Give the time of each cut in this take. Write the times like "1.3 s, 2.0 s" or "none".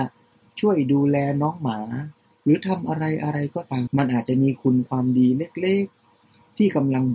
3.9 s